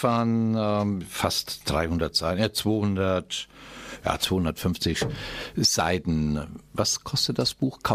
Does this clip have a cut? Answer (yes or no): no